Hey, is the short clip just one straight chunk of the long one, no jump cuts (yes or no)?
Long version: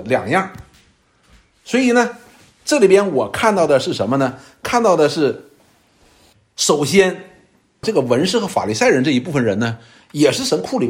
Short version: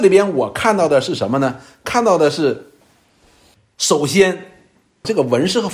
yes